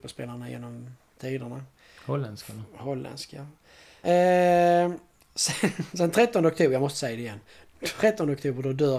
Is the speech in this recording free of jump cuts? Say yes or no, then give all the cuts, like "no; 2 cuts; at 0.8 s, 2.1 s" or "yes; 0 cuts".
yes; 0 cuts